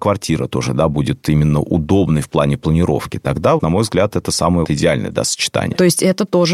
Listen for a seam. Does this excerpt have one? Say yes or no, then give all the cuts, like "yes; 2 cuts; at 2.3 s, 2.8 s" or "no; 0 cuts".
yes; 2 cuts; at 3.6 s, 4.6 s